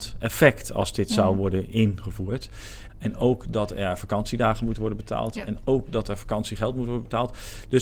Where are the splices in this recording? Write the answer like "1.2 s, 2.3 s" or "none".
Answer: 2.9 s